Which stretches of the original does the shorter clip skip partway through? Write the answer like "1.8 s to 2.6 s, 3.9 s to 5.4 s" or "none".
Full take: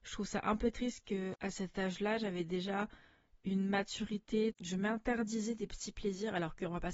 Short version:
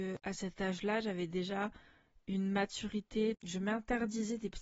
none